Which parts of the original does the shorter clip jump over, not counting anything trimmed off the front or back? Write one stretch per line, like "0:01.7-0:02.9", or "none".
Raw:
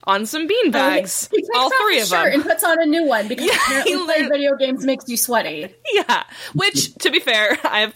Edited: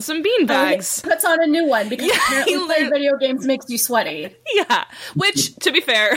0:01.3-0:02.4